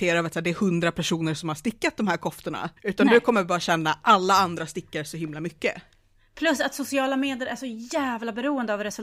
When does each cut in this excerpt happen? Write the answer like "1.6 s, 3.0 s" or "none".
2.8 s